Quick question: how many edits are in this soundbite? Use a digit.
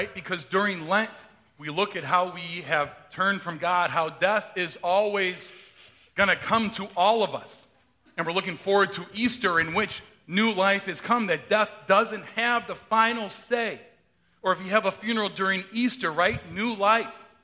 0